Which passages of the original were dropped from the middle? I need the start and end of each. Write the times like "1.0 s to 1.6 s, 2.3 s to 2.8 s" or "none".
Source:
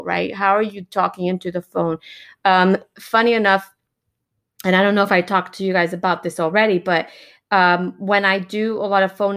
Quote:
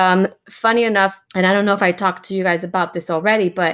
3.8 s to 4.6 s